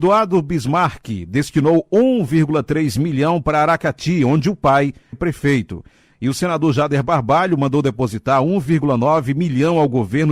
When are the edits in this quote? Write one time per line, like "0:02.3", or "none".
0:05.1